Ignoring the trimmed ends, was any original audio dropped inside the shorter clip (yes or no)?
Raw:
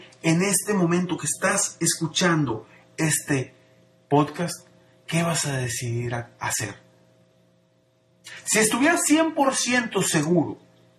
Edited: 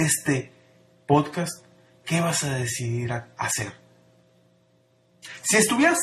no